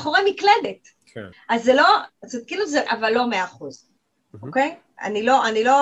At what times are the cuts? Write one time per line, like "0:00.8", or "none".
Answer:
0:01.3
0:02.9